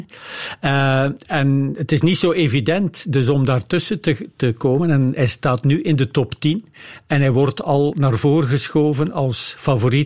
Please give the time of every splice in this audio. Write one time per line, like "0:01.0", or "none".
none